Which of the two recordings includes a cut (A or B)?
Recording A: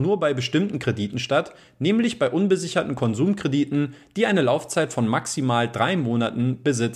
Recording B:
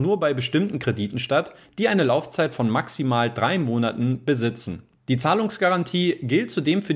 B